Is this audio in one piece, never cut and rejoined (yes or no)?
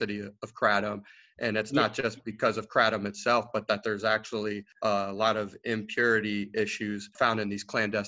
yes